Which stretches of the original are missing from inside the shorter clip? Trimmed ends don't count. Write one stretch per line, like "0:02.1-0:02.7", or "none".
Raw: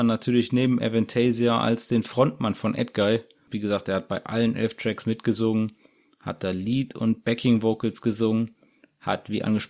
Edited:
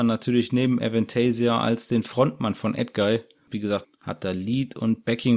0:03.8-0:06.0